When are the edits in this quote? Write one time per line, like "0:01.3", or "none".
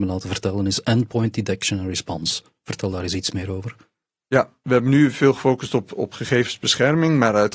none